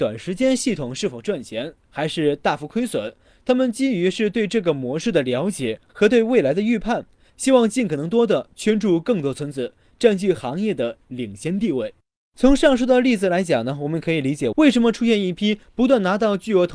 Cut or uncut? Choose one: cut